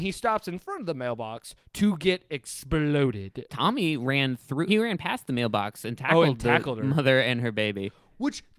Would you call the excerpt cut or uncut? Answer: cut